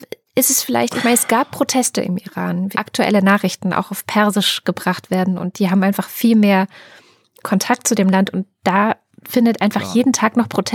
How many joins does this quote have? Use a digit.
1